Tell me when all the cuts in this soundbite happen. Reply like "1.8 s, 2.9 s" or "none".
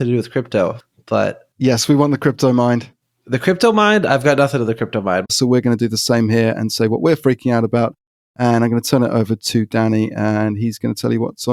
5.2 s